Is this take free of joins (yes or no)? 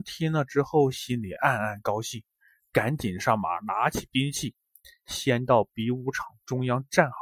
yes